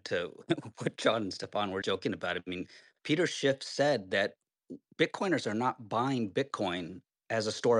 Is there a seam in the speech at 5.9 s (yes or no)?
no